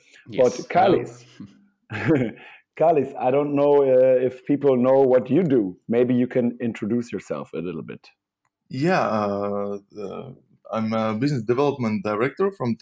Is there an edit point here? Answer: no; 0 cuts

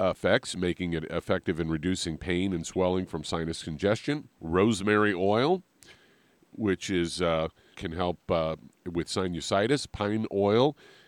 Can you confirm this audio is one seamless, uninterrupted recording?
no; 2 cuts; at 4.3 s, 7.7 s

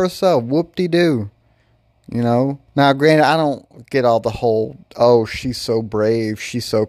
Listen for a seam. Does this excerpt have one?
yes; 1 cut; at 2.7 s

